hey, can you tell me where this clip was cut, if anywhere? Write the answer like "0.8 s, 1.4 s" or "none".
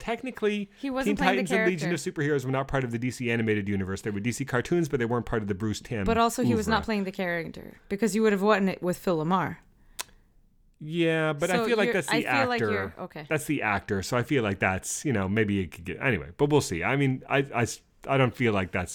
none